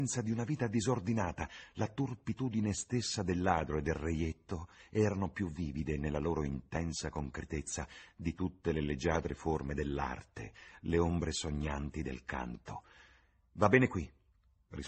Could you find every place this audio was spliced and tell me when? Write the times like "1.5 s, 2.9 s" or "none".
13.5 s